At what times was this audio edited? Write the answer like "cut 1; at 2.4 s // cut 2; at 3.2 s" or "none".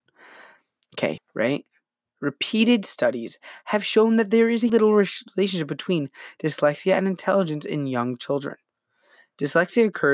cut 1; at 1.2 s // cut 2; at 4.7 s